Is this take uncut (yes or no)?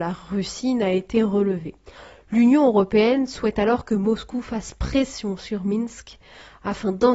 yes